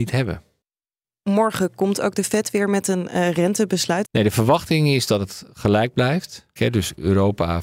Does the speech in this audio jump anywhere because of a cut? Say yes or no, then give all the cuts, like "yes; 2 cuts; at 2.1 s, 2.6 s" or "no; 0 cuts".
yes; 2 cuts; at 4.0 s, 6.6 s